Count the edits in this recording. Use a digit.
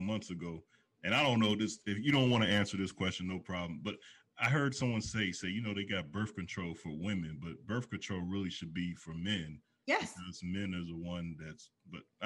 0